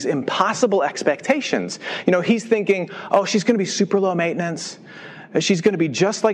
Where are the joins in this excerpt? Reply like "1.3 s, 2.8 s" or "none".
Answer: none